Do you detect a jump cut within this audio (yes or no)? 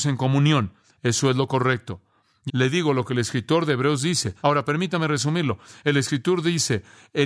yes